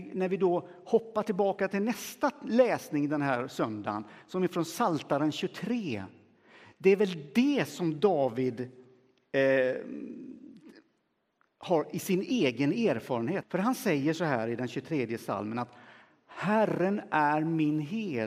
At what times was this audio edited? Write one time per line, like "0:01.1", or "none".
0:13.4